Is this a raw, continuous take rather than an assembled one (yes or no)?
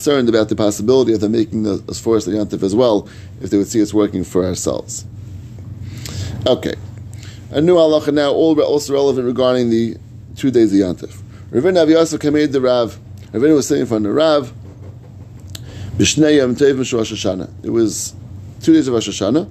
yes